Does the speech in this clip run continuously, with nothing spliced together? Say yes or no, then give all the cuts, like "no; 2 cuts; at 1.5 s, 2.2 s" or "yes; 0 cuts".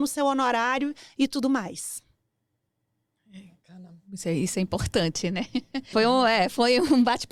no; 1 cut; at 5.9 s